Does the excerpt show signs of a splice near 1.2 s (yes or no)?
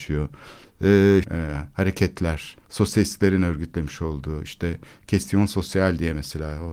yes